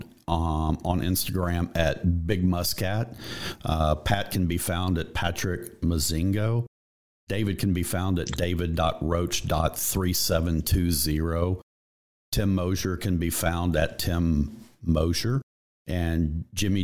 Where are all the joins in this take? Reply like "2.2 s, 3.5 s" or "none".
none